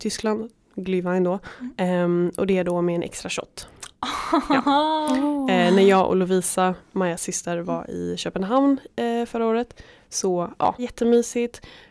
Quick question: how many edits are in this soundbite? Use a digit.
1